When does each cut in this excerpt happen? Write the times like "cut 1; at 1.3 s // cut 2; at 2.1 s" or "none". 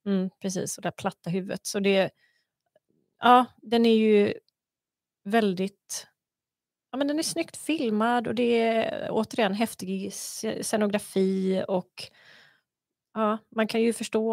none